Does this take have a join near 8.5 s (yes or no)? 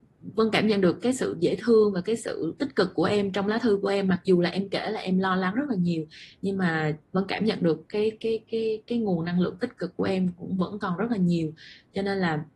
no